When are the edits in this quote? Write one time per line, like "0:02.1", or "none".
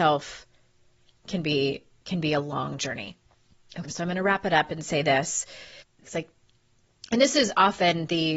0:03.9
0:06.0